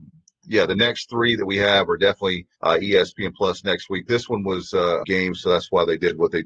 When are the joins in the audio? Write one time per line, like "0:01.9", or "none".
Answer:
0:02.5
0:05.0